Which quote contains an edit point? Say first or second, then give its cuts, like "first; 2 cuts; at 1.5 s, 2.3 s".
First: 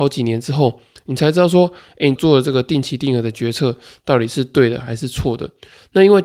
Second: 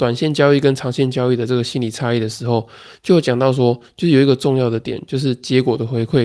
first; 1 cut; at 2.2 s